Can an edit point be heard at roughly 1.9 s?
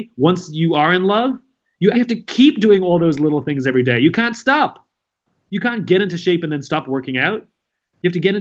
yes; 1 cut; at 1.9 s

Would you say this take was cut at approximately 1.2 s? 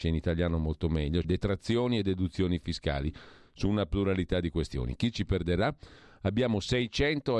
yes; 1 cut; at 1.2 s

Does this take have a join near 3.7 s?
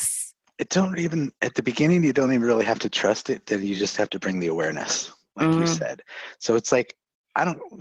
no; 0 cuts

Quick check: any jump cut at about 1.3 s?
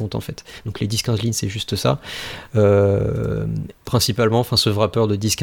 no; 2 cuts; at 2.5 s, 3.7 s

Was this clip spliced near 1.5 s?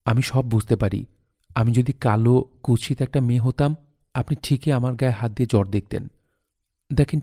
no; 0 cuts

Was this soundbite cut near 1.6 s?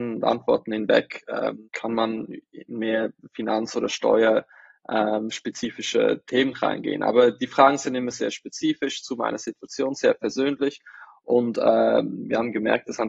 yes; 1 cut; at 1.6 s

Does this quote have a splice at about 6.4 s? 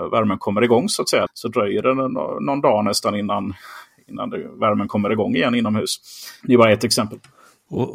yes; 2 cuts; at 1.3 s, 6.4 s

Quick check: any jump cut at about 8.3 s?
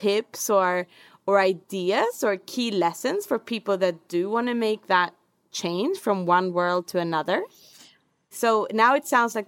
yes; 1 cut; at 8.3 s

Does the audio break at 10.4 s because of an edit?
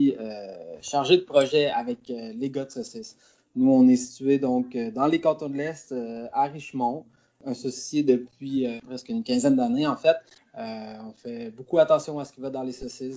yes; 1 cut; at 10.4 s

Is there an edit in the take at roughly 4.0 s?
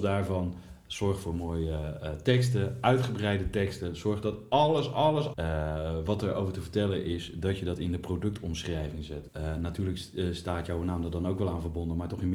no; 2 cuts; at 5.3 s, 9.3 s

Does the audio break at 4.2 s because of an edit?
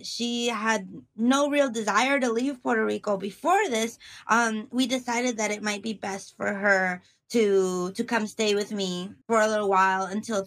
no; 1 cut; at 9.2 s

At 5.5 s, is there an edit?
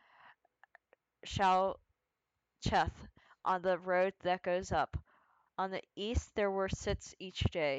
yes; 1 cut; at 5.5 s

